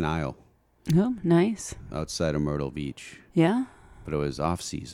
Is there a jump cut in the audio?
no; 0 cuts

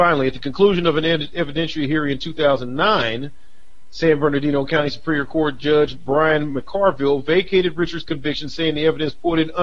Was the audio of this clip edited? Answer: no; 0 cuts

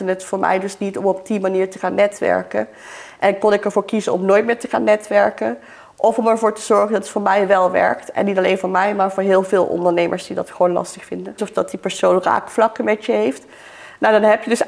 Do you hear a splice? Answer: yes; 1 cut; at 11.4 s

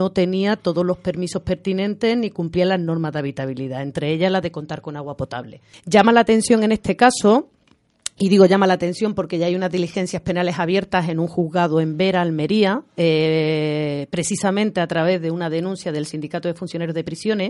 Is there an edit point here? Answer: yes; 1 cut; at 5.7 s

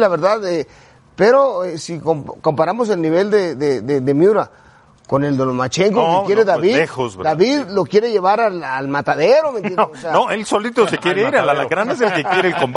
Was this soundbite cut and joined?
no; 0 cuts

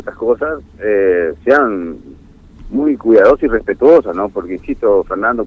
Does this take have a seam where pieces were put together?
no; 0 cuts

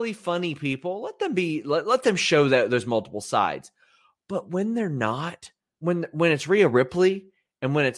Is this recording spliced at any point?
no; 0 cuts

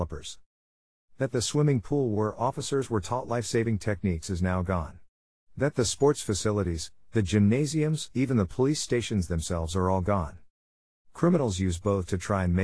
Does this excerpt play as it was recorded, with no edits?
no; 2 cuts; at 8.1 s, 10.9 s

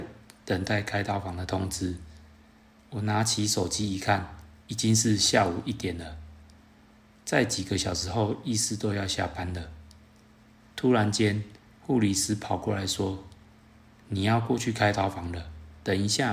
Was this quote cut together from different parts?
no; 0 cuts

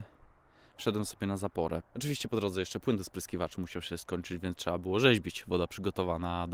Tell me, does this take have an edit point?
yes; 1 cut; at 1.8 s

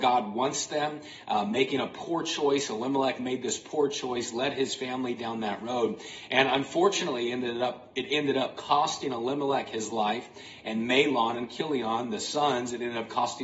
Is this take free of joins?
yes; 0 cuts

